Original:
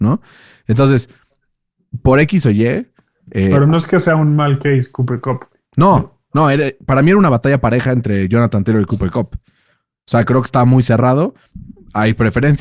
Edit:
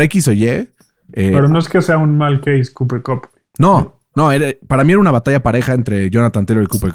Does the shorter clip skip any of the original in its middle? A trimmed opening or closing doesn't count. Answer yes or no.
no